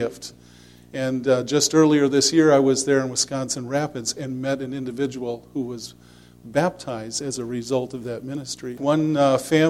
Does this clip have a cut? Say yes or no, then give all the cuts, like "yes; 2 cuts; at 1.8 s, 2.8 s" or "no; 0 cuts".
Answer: yes; 1 cut; at 8.8 s